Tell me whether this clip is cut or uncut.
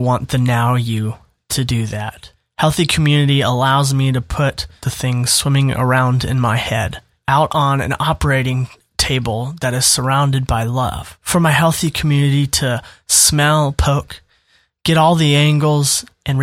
uncut